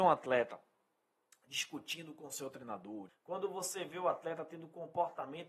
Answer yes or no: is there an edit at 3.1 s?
yes